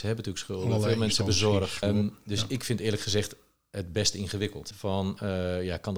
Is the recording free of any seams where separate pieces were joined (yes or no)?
no